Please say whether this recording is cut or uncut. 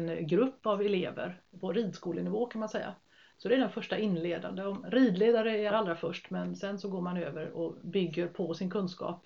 cut